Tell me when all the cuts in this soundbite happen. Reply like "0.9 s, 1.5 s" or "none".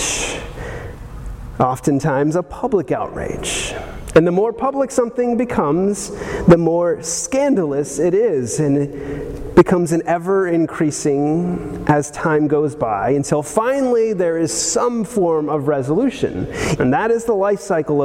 16.8 s